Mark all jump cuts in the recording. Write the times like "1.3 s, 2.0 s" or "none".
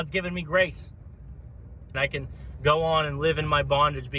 1.9 s